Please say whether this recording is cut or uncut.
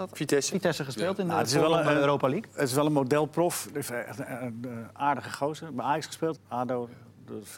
cut